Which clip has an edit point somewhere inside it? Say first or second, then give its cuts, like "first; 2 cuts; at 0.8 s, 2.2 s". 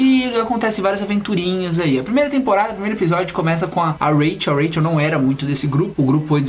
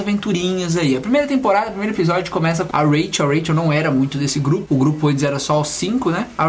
second; 1 cut; at 2.7 s